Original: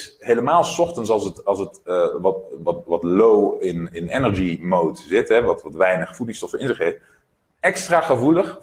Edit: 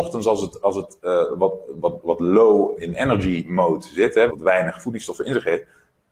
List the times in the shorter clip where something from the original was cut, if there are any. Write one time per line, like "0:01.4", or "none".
0:02.8
0:04.3